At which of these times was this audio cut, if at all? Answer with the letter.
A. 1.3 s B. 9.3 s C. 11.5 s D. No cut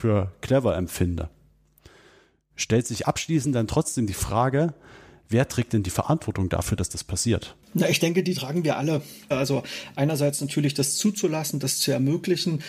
B